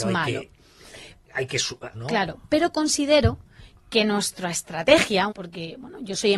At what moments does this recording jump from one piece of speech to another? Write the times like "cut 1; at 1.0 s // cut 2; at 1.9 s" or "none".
cut 1; at 1.9 s // cut 2; at 5.3 s